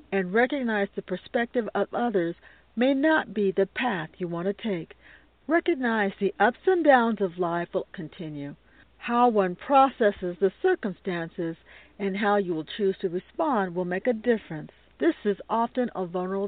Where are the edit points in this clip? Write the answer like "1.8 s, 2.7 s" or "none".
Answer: 5.3 s, 7.9 s